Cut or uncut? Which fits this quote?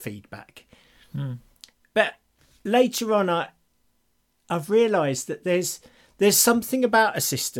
uncut